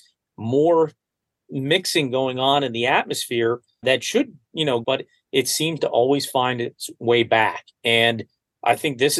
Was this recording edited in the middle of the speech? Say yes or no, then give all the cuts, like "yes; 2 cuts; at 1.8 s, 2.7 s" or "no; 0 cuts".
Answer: yes; 2 cuts; at 3.8 s, 4.8 s